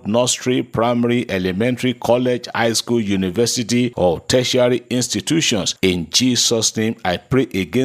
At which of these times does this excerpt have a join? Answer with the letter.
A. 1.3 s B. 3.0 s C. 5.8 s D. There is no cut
C